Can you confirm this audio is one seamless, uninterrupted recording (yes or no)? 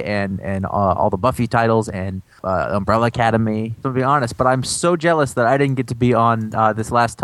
no